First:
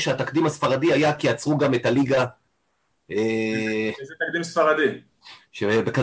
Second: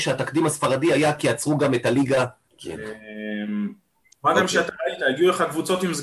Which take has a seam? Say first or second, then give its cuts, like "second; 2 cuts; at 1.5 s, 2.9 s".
second; 2 cuts; at 2.5 s, 4.1 s